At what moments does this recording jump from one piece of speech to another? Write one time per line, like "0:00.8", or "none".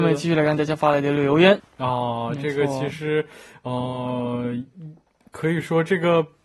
0:01.6